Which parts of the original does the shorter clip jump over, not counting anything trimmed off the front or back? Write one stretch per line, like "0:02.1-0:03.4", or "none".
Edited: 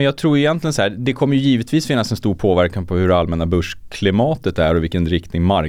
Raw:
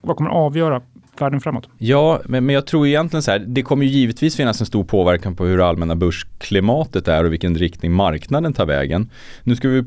none